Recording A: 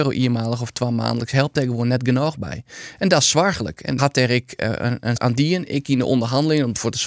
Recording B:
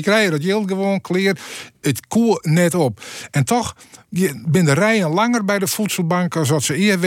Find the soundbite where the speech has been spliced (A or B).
A